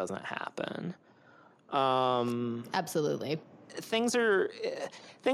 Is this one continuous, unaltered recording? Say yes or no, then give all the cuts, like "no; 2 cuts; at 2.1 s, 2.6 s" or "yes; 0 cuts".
yes; 0 cuts